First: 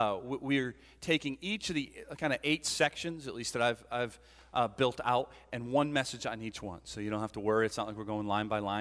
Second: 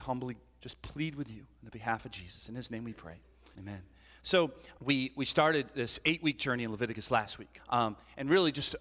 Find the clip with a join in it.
second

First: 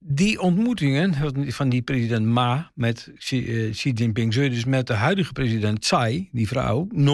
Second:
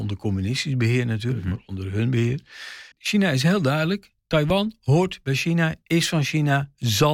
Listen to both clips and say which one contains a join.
second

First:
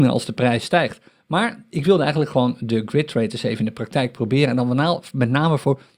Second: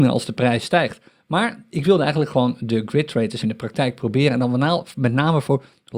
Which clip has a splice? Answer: second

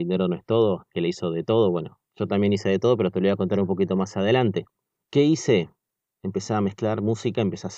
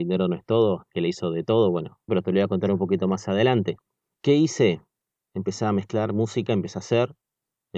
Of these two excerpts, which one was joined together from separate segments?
second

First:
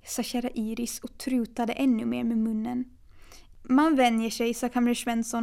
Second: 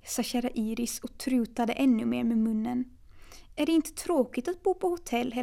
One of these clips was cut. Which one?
first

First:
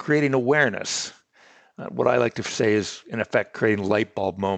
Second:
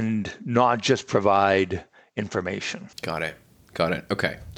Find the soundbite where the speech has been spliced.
second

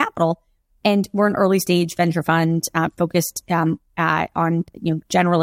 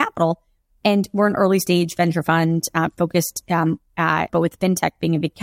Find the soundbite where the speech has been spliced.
second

